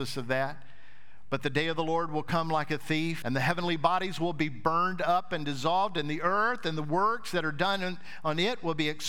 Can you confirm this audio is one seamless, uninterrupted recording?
no; 1 cut; at 3.2 s

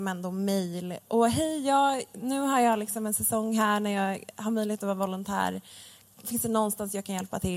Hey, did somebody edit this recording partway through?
no; 0 cuts

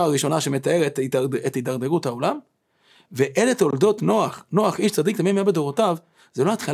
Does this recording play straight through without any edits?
yes; 0 cuts

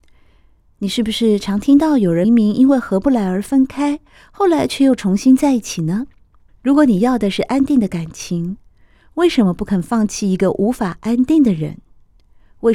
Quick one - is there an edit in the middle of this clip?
yes; 2 cuts; at 2.2 s, 6.5 s

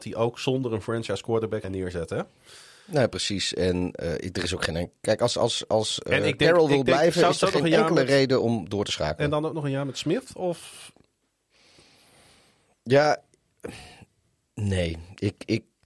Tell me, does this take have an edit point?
yes; 1 cut; at 1.6 s

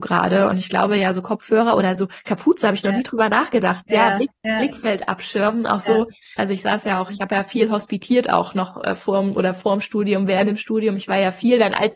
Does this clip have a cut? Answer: yes; 1 cut; at 6.4 s

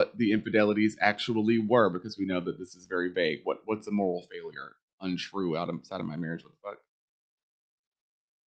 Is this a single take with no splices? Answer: yes; 0 cuts

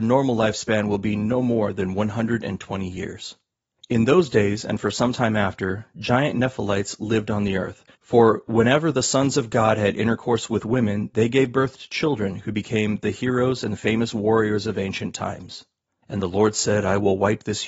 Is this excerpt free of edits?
no; 2 cuts; at 7.9 s, 16.0 s

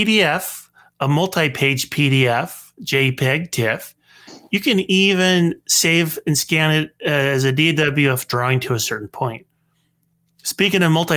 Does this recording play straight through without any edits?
yes; 0 cuts

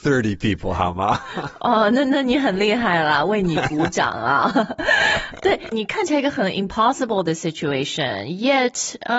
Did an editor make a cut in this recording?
yes; 1 cut; at 5.7 s

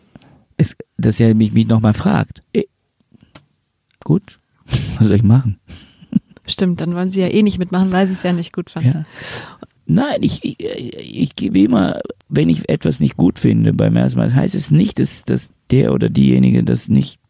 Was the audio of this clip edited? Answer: yes; 3 cuts; at 2.4 s, 12.2 s, 15.5 s

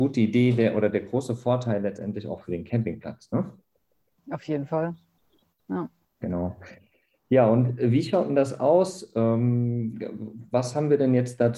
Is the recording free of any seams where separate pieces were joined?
yes; 0 cuts

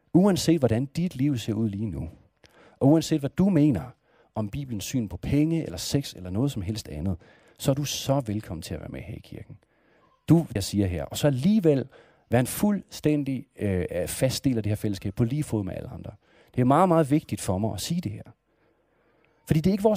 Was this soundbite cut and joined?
yes; 1 cut; at 10.6 s

